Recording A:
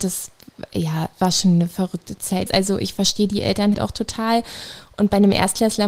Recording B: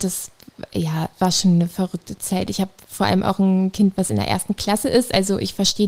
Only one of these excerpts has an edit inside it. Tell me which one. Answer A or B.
A